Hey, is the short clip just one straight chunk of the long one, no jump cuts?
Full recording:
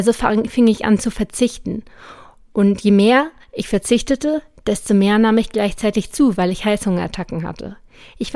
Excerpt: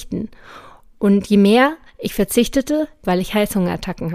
no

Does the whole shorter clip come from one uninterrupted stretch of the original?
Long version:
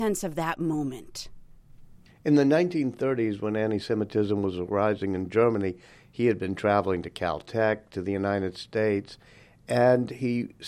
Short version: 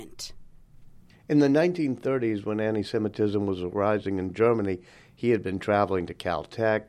yes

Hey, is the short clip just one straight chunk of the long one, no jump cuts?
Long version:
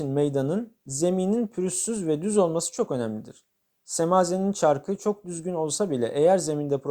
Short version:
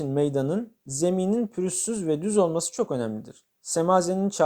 no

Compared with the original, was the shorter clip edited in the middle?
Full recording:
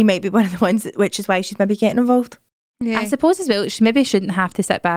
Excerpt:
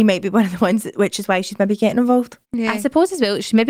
yes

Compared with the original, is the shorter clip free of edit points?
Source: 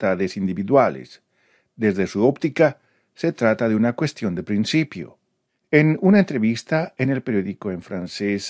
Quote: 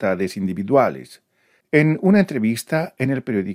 no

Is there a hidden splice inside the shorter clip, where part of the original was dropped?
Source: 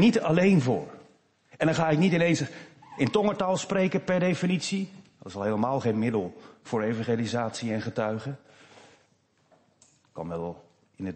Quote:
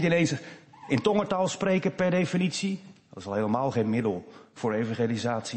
no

